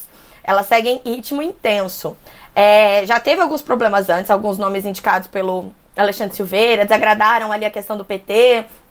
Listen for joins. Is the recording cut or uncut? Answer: uncut